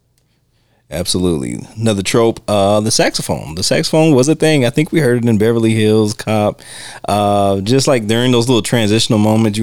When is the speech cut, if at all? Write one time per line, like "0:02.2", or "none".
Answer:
none

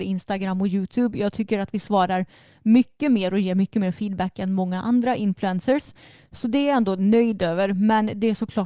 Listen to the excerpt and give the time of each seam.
none

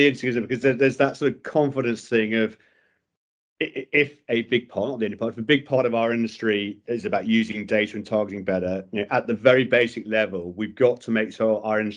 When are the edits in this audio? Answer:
0:06.8

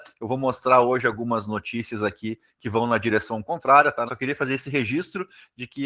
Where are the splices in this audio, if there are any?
0:04.1

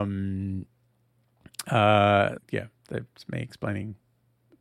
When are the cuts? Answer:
0:02.4

